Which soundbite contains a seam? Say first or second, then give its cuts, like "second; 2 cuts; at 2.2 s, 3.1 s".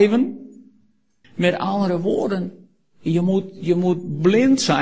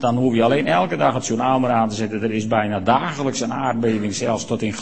first; 1 cut; at 1.2 s